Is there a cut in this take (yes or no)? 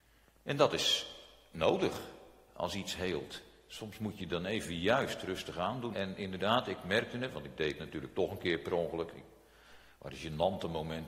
yes